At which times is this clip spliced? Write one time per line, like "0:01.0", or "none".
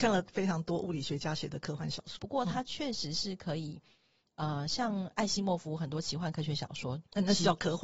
0:02.2